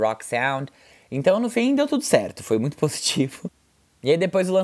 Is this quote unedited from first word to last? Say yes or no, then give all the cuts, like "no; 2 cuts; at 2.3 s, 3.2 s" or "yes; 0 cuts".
yes; 0 cuts